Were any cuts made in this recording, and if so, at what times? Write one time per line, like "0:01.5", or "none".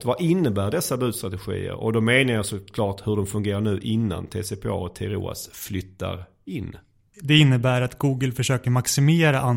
0:07.1